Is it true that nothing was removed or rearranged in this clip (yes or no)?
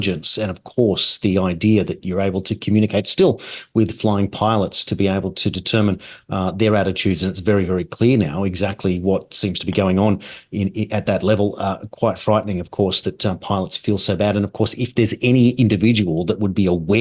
yes